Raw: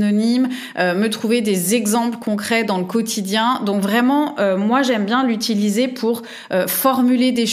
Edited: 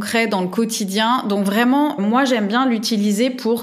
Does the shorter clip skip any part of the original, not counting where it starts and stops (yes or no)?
yes